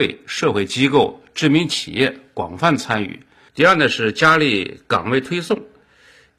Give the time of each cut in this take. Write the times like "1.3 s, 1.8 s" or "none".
3.5 s